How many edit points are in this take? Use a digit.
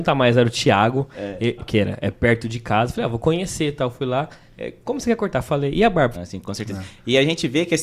2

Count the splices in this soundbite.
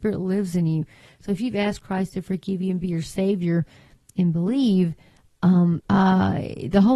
1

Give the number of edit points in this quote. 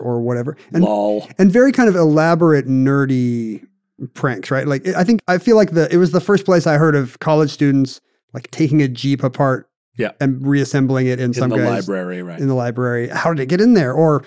1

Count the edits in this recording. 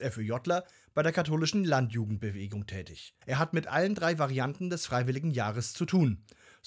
1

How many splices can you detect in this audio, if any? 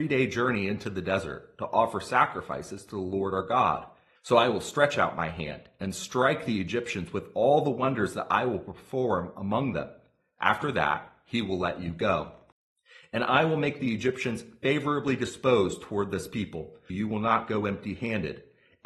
2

